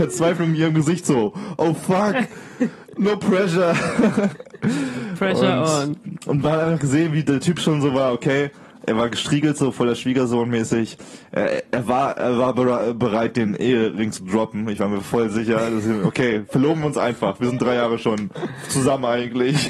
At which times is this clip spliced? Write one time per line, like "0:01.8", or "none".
none